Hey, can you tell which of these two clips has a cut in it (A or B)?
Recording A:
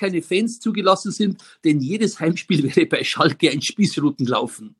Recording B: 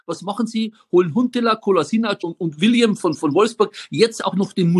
B